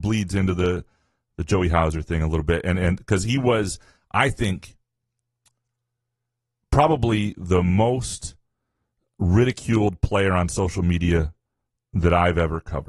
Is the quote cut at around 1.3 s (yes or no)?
no